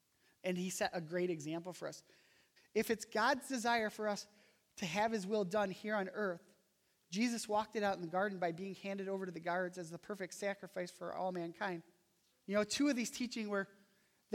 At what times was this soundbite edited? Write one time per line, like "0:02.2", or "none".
0:02.6
0:12.3

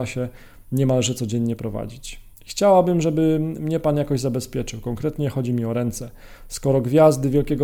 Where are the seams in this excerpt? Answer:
0:02.3

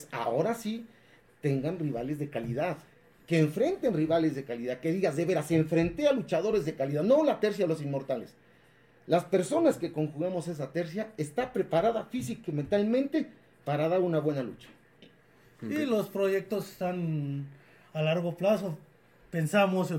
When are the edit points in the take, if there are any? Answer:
none

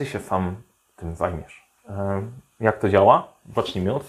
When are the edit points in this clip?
0:01.8

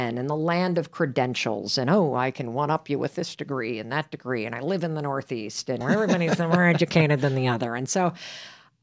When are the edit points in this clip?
0:05.8

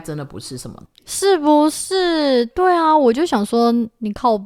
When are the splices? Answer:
none

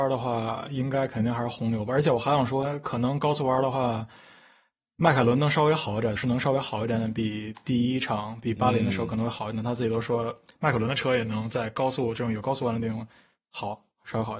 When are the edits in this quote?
0:06.2

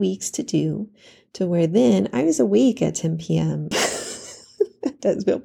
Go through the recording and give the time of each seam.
0:03.7

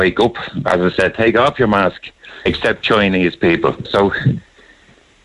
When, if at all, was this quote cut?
0:02.5
0:03.8

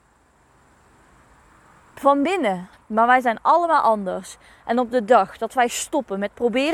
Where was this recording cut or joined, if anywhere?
0:02.7

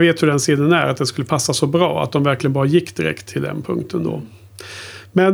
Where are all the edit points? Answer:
none

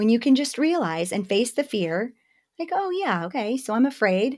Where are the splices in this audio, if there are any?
none

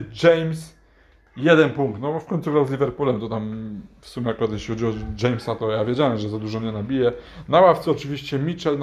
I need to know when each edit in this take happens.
none

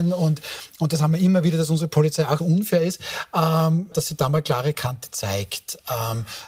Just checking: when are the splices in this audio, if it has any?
0:02.4
0:03.9

